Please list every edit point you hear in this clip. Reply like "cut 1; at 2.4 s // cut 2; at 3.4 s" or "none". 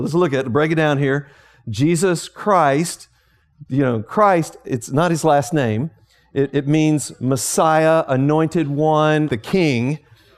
cut 1; at 9.3 s